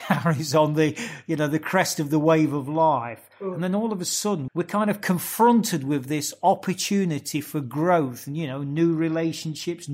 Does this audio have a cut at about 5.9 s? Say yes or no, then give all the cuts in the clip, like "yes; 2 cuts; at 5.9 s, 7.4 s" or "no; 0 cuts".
no; 1 cut; at 4.5 s